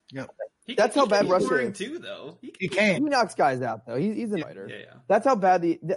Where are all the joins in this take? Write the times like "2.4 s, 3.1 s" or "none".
2.9 s, 4.4 s